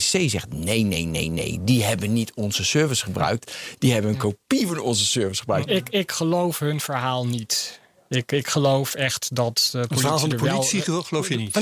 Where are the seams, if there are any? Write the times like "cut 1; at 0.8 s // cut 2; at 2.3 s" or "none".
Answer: cut 1; at 5.7 s